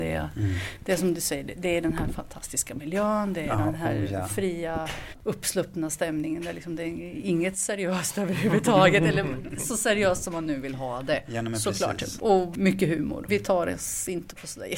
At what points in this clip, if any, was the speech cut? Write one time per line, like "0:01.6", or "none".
0:13.3